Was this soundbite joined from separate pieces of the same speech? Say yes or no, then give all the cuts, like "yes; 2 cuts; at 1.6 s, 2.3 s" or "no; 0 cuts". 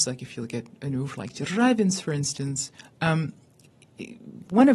no; 0 cuts